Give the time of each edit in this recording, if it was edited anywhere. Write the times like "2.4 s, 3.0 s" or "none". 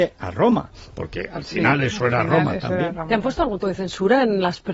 3.6 s